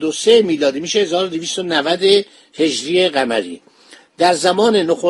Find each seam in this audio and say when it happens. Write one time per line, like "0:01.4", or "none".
none